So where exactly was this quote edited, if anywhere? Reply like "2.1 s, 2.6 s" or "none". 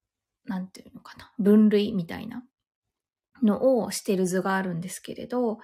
none